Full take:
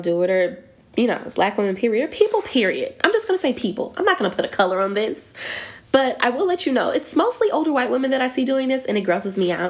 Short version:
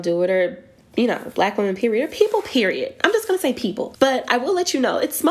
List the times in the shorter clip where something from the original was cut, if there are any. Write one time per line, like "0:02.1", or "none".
0:03.9

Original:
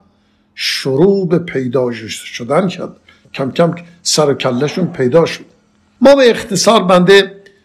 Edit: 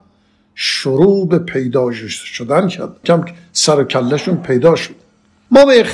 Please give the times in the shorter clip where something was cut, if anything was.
0:03.0

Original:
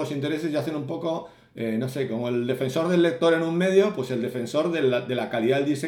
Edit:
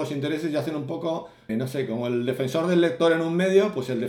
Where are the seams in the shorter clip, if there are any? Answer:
0:01.5

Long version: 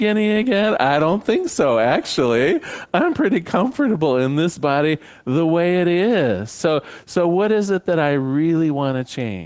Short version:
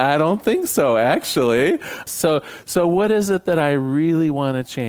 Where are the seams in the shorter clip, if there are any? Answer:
0:02.1

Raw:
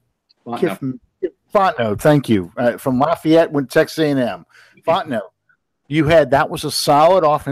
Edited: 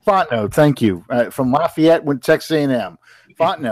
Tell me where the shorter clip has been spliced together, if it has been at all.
none

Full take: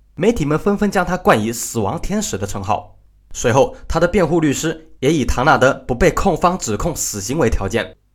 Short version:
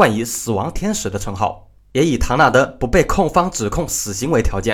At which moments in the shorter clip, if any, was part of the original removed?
0:01.9

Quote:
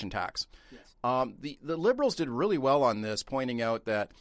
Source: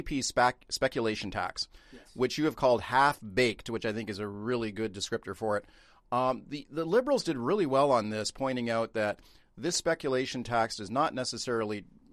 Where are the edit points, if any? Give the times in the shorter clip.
0:00.9

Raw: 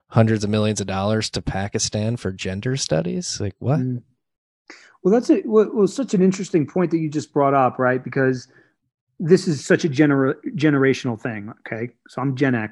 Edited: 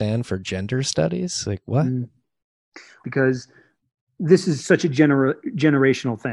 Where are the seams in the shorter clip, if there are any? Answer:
0:03.0

